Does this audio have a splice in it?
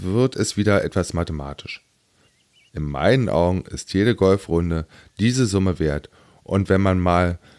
yes; 1 cut; at 2.7 s

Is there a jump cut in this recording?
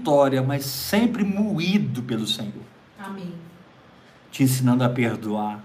yes; 1 cut; at 3.0 s

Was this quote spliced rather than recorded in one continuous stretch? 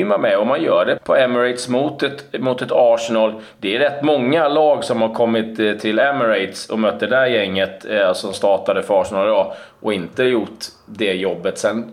yes; 2 cuts; at 1.0 s, 8.3 s

